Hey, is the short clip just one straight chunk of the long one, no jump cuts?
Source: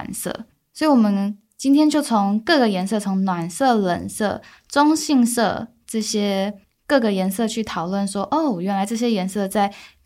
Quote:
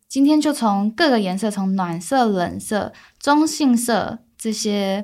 yes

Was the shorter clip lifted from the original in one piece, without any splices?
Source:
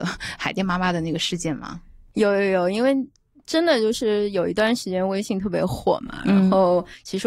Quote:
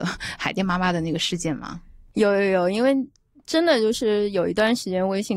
yes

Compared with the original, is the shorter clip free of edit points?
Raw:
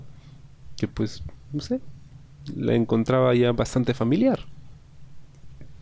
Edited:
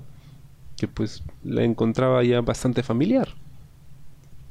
no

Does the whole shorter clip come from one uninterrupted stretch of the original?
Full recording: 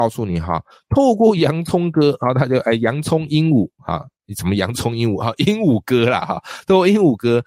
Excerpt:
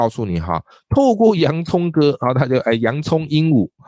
yes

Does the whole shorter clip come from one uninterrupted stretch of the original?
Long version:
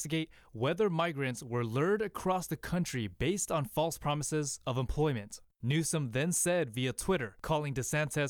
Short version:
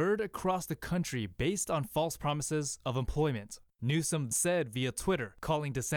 no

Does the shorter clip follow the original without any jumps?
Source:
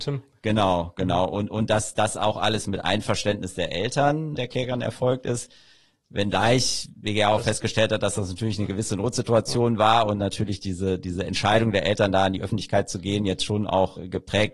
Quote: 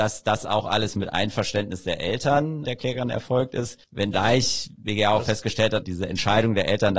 no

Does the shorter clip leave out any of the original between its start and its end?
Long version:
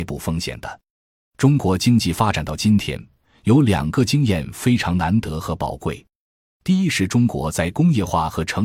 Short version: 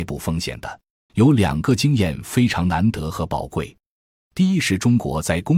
yes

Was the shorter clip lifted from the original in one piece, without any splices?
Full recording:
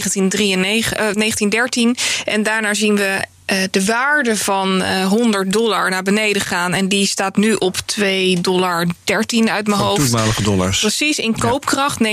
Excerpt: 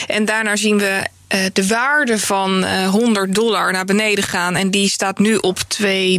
yes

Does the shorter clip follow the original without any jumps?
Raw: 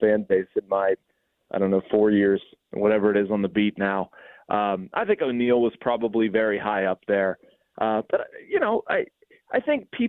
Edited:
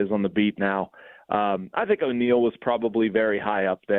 yes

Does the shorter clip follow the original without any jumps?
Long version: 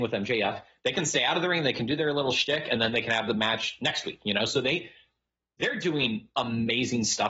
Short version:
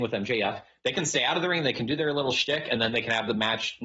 yes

